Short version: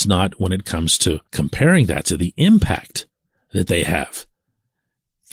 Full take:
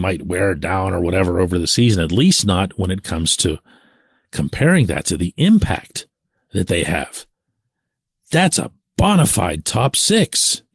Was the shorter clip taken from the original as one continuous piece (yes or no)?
no